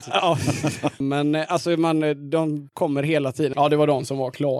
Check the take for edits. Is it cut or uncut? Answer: cut